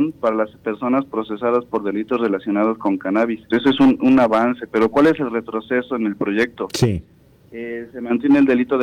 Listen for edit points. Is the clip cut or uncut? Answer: cut